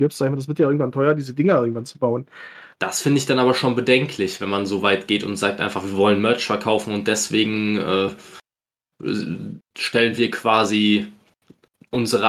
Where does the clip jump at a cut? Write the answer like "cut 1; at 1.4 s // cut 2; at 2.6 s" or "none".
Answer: cut 1; at 2.7 s